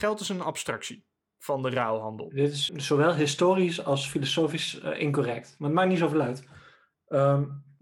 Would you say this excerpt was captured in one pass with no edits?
no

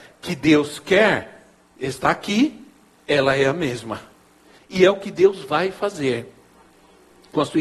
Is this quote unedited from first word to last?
no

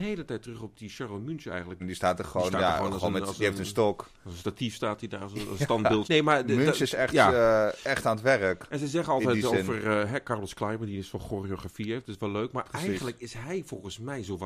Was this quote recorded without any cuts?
no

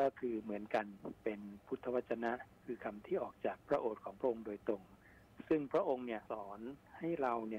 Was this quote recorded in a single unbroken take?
no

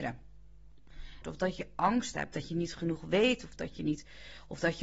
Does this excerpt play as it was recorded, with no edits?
no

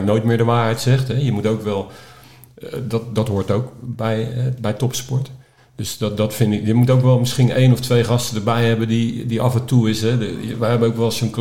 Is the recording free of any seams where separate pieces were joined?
yes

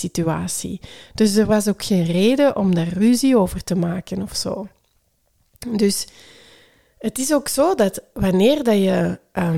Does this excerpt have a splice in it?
no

